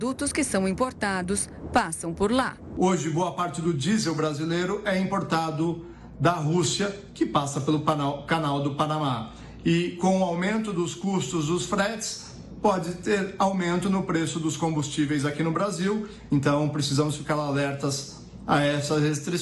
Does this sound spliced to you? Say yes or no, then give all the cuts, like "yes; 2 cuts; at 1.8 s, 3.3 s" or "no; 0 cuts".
yes; 1 cut; at 16.3 s